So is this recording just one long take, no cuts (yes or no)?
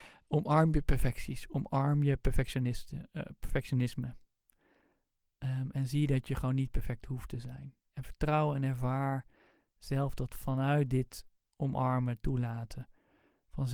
yes